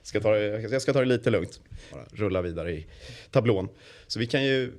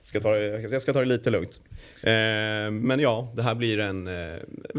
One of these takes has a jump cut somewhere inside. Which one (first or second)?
first